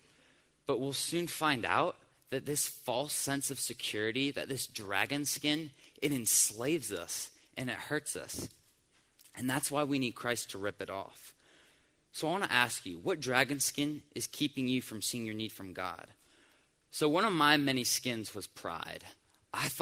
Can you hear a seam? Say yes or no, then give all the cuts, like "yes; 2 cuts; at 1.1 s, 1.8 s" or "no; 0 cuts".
no; 0 cuts